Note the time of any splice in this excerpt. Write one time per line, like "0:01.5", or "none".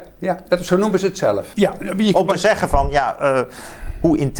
0:01.5